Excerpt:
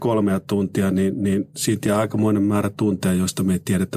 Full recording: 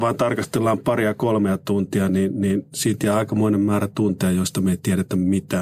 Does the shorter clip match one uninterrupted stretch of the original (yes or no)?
yes